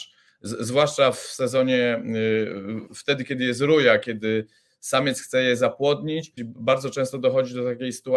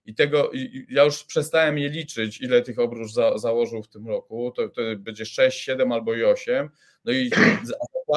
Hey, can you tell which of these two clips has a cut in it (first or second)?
first